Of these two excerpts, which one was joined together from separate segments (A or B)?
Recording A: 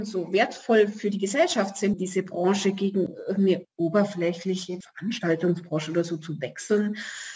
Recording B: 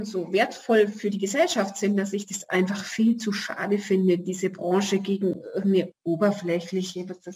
A